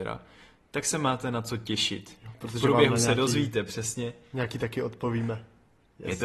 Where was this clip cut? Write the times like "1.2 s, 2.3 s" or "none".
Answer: none